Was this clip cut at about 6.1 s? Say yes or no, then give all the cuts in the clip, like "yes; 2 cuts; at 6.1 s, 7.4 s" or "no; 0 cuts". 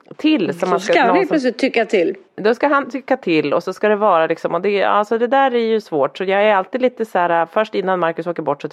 no; 1 cut; at 2.2 s